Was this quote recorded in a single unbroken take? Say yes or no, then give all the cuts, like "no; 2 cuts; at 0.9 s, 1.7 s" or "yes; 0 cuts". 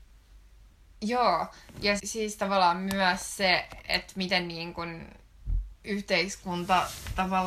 no; 2 cuts; at 2.0 s, 5.8 s